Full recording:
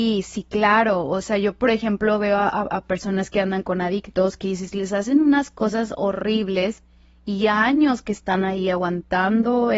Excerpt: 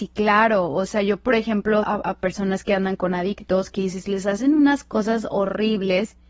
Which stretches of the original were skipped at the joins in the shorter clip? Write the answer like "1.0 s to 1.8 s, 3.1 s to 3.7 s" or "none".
2.2 s to 2.5 s